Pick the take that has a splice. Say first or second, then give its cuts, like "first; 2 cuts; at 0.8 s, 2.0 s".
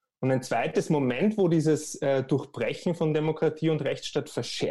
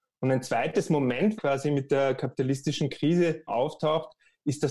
second; 2 cuts; at 1.4 s, 3.5 s